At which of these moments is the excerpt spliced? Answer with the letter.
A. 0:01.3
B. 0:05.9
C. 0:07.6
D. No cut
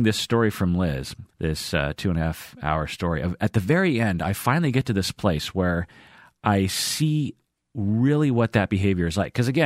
A